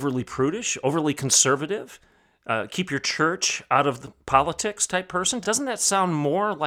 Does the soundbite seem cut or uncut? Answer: uncut